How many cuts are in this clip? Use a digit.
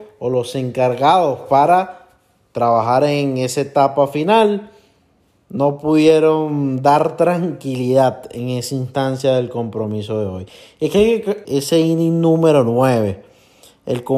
1